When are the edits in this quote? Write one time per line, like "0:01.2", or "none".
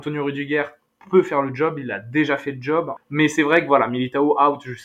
0:03.0